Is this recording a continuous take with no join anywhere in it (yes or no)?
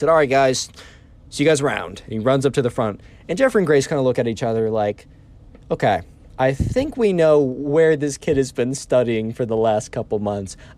yes